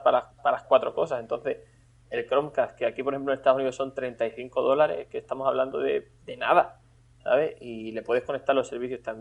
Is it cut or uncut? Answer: uncut